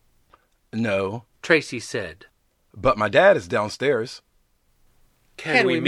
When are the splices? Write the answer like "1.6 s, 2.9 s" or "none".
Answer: 1.3 s